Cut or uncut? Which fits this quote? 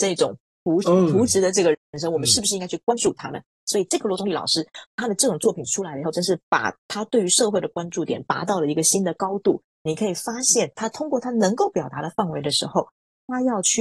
cut